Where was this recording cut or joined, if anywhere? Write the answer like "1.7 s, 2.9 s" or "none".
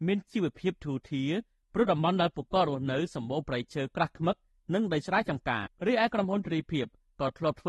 5.7 s